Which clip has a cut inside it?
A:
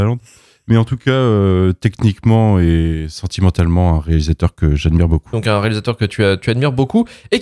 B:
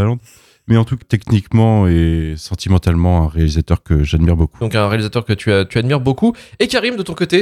B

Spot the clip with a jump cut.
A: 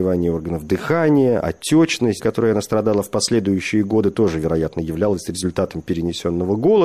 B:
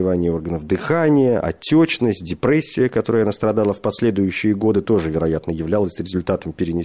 A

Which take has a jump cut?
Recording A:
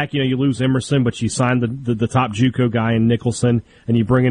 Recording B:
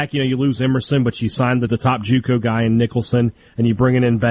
B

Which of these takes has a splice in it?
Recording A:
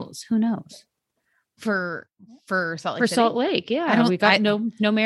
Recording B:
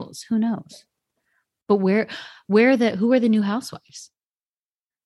A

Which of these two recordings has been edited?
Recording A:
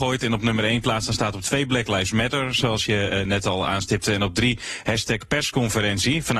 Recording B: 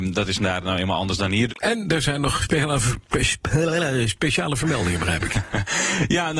B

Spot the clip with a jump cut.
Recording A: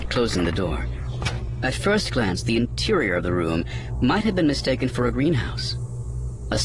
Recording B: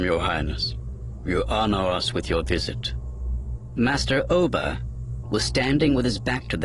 B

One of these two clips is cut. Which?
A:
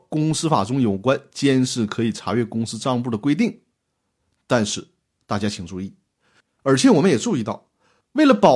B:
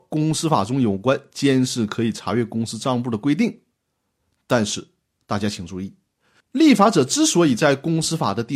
A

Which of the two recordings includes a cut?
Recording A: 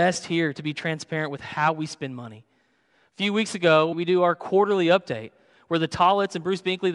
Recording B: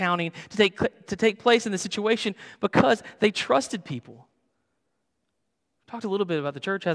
A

